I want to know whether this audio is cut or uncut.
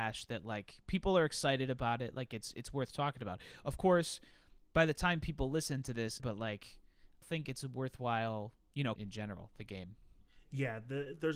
cut